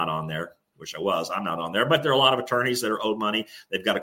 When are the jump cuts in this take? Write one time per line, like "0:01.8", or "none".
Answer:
none